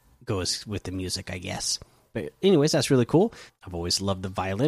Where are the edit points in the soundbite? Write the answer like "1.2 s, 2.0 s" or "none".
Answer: 3.5 s